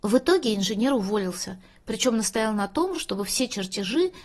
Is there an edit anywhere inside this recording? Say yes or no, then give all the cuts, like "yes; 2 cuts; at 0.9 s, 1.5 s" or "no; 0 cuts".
no; 0 cuts